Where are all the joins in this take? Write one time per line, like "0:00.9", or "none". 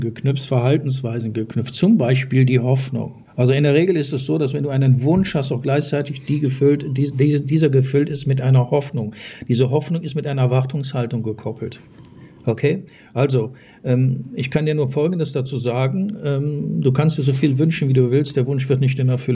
0:03.3